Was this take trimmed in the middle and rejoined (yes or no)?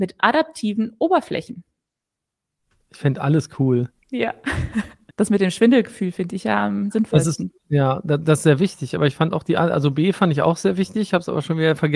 yes